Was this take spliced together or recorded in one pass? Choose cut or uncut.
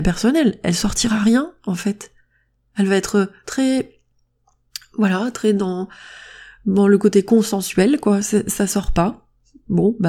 uncut